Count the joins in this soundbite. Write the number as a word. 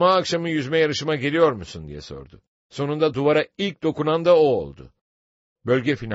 one